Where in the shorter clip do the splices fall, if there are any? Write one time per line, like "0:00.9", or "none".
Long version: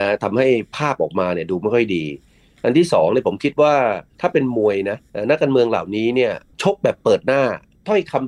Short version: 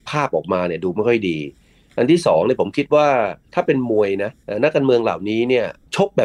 none

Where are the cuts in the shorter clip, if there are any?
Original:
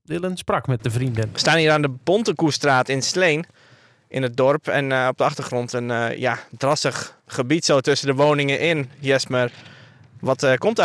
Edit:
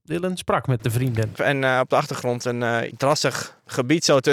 0:01.3
0:02.9

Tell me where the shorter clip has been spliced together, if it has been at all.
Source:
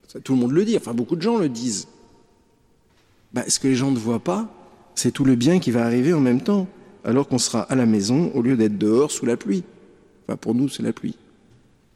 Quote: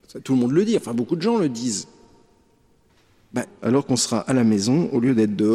0:03.4

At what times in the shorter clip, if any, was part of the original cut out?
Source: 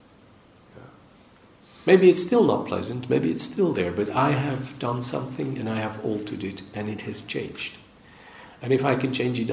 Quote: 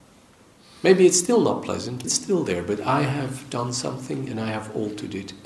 0:02.0

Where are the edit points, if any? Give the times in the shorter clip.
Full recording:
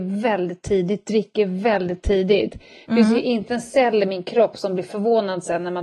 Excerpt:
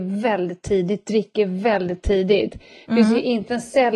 none

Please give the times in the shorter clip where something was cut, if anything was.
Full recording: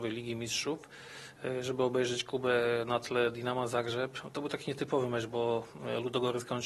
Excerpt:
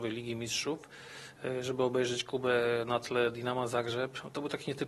none

